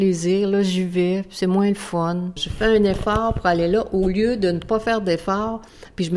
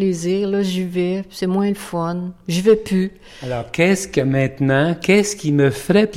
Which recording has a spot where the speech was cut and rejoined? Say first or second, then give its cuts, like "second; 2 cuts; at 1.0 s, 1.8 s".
first; 1 cut; at 2.4 s